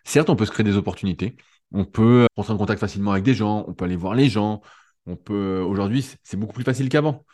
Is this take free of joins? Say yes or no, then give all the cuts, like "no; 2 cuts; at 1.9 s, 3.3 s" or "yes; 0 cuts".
no; 1 cut; at 2.3 s